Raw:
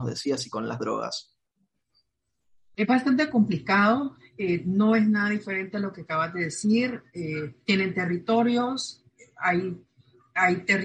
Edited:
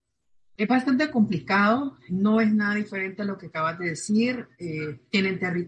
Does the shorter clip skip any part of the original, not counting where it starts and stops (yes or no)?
yes